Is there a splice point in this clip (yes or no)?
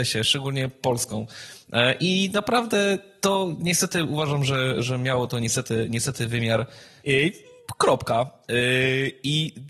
yes